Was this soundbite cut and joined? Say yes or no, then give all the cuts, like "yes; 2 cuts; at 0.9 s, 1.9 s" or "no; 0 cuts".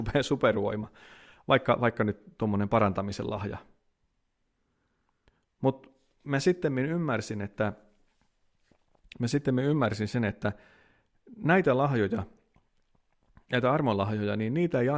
no; 0 cuts